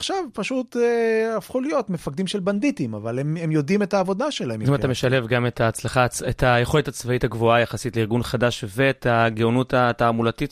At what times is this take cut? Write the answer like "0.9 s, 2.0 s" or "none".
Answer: none